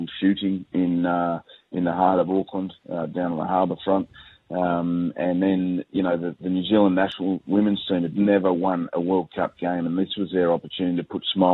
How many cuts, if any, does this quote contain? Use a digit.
0